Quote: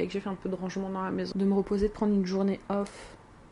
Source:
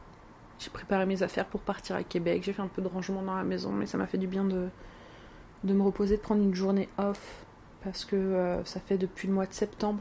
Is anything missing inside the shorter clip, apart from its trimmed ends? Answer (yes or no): yes